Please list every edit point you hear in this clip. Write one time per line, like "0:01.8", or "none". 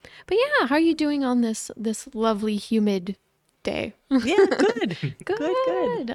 none